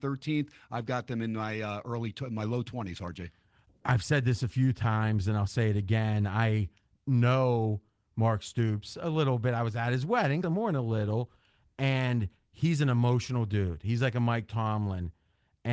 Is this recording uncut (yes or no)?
no